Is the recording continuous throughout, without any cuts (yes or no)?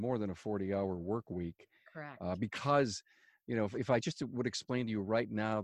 yes